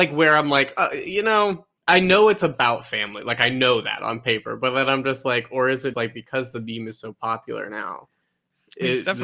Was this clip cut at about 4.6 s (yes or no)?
no